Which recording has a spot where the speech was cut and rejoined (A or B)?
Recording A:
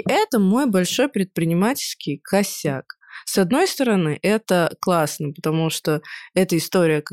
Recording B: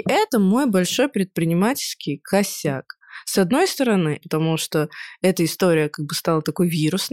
B